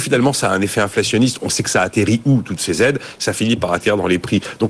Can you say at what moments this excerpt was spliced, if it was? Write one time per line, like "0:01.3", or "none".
none